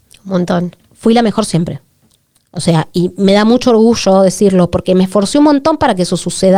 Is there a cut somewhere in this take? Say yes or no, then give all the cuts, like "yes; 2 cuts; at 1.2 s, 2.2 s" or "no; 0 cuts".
no; 0 cuts